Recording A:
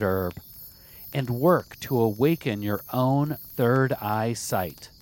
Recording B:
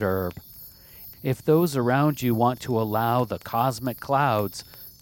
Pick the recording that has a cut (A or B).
B